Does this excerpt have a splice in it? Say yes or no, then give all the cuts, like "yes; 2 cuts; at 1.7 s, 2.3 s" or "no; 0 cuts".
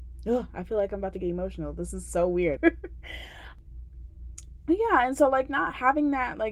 yes; 1 cut; at 2.6 s